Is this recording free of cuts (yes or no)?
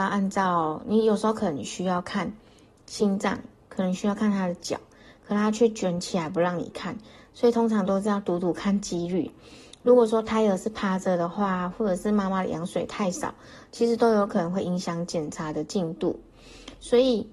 yes